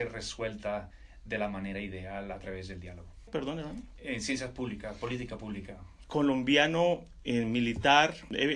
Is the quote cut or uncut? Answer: cut